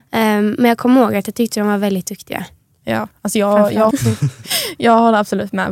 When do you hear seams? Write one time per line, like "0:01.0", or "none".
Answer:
0:03.9